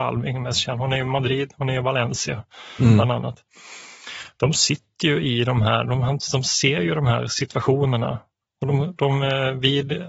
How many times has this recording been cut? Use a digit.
0